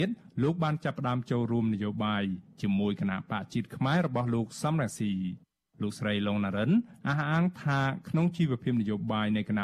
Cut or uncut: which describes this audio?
uncut